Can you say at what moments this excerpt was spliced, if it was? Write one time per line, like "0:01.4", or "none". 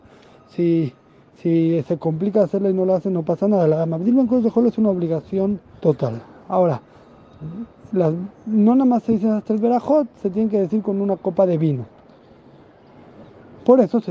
0:05.8